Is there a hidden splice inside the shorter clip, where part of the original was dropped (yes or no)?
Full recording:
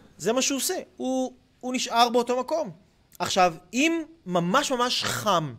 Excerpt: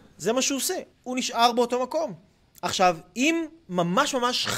yes